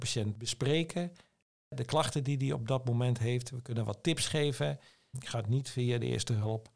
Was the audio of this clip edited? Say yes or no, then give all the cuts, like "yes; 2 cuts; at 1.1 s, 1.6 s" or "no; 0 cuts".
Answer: yes; 1 cut; at 5.1 s